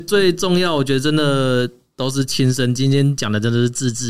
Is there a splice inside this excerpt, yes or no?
no